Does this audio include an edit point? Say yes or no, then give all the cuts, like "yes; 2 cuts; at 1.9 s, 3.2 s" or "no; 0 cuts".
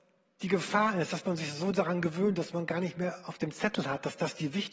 no; 0 cuts